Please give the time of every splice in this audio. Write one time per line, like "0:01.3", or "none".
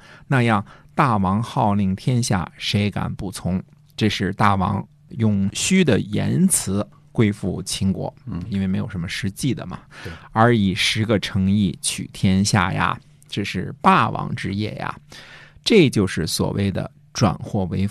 none